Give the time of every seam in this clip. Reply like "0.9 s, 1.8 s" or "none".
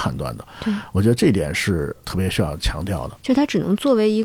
3.2 s